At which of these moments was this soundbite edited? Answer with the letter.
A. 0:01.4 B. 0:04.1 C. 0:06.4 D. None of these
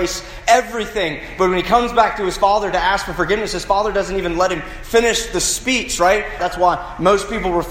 C